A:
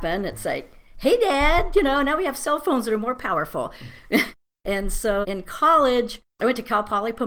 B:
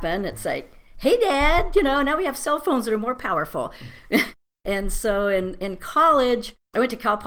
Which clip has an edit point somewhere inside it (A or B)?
A